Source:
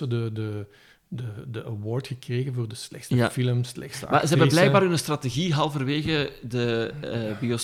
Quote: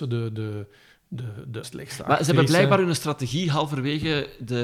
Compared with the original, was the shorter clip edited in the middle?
yes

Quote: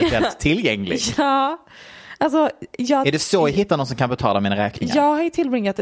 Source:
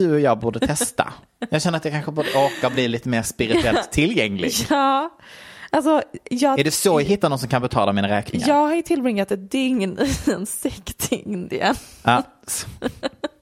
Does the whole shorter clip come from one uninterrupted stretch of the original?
yes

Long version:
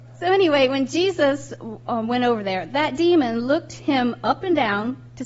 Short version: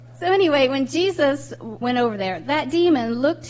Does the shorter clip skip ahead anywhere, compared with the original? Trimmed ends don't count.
yes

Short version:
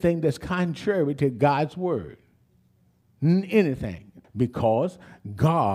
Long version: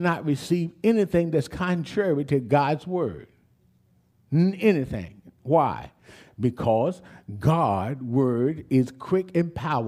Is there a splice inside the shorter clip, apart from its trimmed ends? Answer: yes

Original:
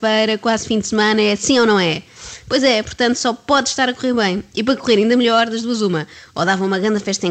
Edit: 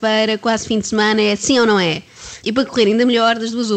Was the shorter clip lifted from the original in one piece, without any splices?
no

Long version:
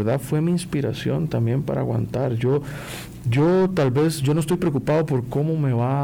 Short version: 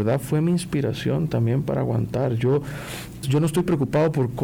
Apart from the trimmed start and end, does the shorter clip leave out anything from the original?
yes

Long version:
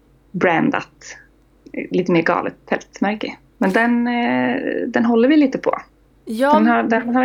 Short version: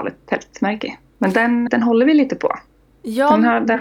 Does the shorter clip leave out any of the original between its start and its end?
yes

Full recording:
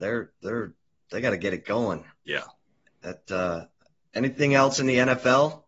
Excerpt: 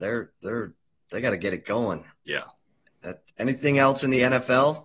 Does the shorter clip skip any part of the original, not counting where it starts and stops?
yes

